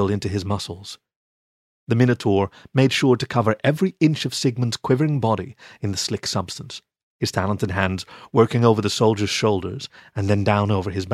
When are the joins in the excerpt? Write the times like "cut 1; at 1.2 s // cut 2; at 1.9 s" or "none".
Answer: none